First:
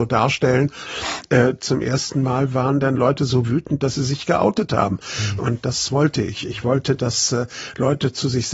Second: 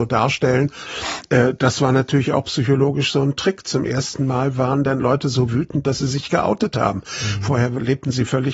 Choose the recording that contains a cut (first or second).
first